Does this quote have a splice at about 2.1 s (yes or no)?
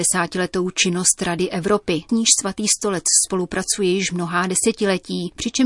yes